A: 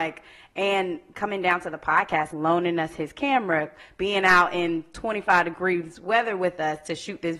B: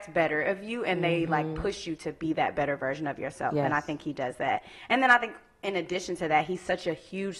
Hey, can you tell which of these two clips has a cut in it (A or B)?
A